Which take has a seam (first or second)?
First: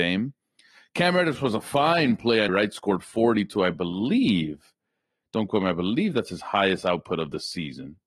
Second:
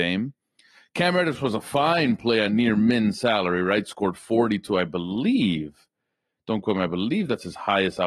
first